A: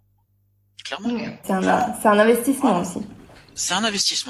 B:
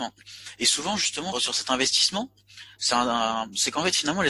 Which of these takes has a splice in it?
B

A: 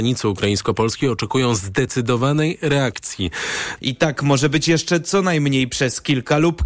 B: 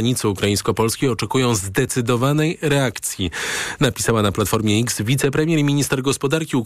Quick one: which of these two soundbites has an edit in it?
A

